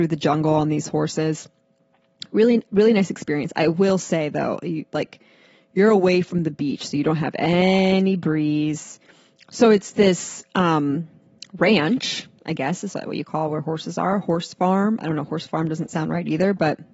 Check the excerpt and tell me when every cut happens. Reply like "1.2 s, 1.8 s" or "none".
9.4 s